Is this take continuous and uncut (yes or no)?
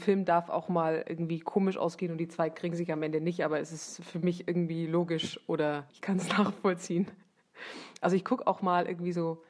no